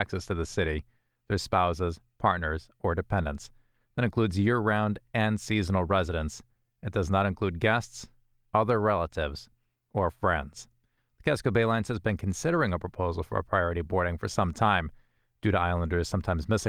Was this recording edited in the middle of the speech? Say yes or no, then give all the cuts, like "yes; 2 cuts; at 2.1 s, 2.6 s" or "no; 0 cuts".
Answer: no; 0 cuts